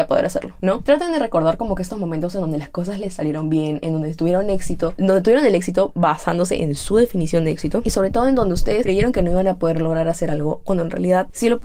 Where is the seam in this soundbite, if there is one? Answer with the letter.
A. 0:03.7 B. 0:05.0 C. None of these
B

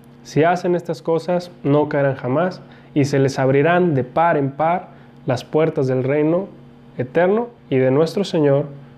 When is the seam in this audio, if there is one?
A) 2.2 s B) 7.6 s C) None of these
B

